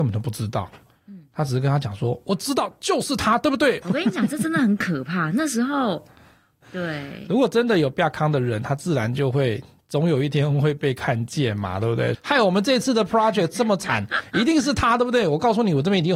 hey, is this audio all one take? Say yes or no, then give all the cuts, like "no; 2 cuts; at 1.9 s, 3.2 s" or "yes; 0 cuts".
no; 3 cuts; at 3.8 s, 6.6 s, 12.1 s